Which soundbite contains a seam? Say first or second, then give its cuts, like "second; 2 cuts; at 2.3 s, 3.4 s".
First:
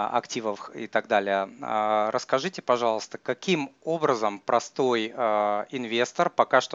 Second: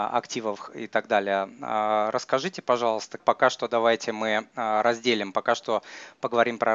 second; 1 cut; at 3.2 s